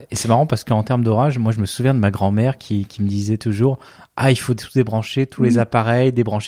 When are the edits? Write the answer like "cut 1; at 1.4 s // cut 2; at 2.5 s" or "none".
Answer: none